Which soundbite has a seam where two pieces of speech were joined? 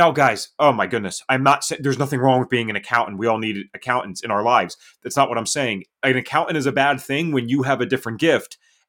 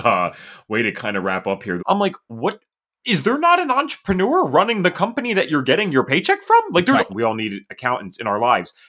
second; 2 cuts; at 1.8 s, 7.1 s

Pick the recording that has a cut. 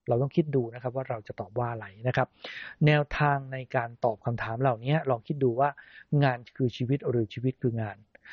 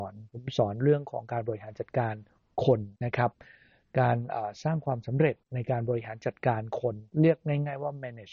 second; 3 cuts; at 3.0 s, 5.4 s, 7.1 s

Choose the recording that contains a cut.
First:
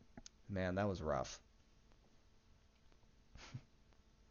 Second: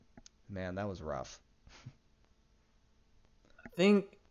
second; 1 cut; at 1.4 s

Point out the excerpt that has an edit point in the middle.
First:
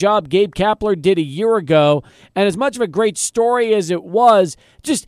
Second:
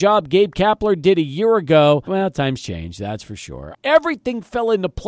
second; 2 cuts; at 2.1 s, 3.7 s

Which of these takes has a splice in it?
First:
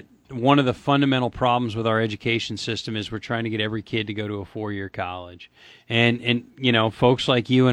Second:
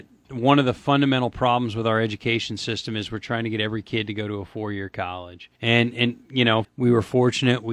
second; 2 cuts; at 5.6 s, 6.6 s

